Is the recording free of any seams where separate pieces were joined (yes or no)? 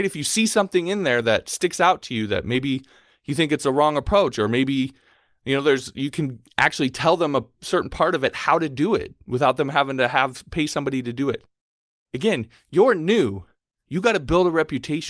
yes